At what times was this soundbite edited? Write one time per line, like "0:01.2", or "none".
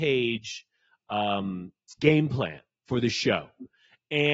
0:02.0